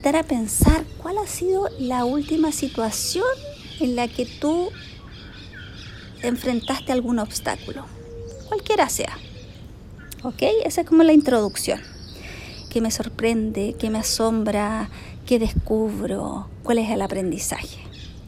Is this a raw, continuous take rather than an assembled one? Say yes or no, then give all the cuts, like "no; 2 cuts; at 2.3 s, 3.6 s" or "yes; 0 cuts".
no; 2 cuts; at 10.2 s, 12.7 s